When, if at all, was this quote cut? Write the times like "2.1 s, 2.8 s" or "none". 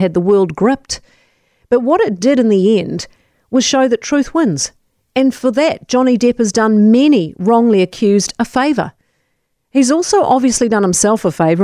none